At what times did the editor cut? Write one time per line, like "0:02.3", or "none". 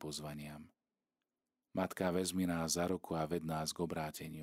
0:01.5